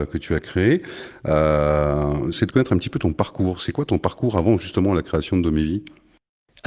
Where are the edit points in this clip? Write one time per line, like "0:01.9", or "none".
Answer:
0:02.3

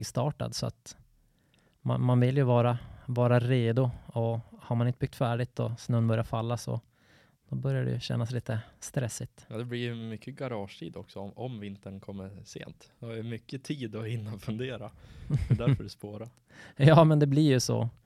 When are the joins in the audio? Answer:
none

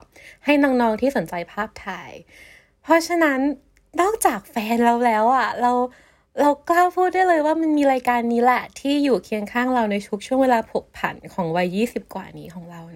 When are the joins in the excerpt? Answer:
none

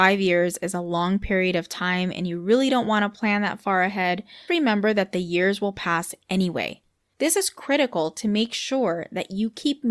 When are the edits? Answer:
0:04.5
0:07.0

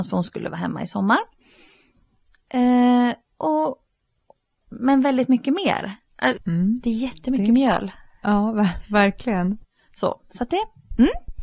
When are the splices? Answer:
0:04.6
0:06.4

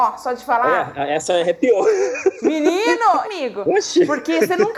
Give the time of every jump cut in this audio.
0:03.2

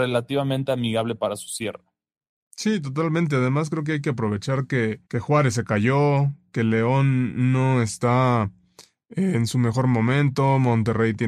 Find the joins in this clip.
0:05.1

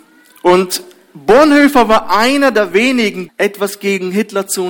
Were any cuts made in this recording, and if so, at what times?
0:03.3

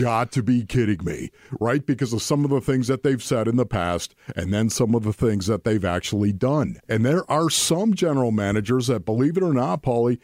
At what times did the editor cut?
0:06.8

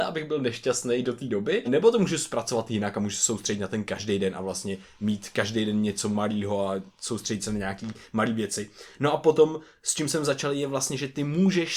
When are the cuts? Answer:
0:01.6

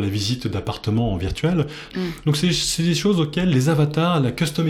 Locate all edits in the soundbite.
0:01.9

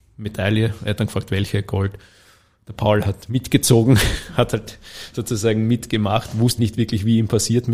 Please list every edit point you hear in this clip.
0:06.6

